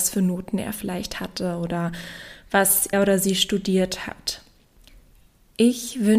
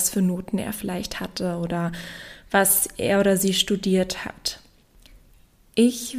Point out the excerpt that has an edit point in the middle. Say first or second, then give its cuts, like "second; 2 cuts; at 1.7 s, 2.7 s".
first; 1 cut; at 2.9 s